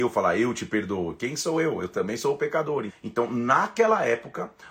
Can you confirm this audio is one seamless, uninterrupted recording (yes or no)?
no